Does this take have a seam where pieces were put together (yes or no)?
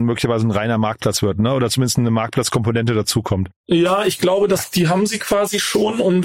no